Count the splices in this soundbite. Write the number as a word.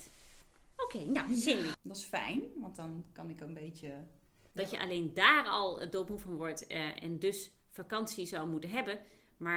two